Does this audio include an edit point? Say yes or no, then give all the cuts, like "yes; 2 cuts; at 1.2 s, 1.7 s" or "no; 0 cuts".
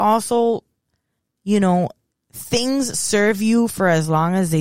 no; 0 cuts